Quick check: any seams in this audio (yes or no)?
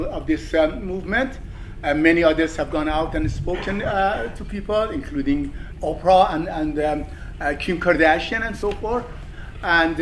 no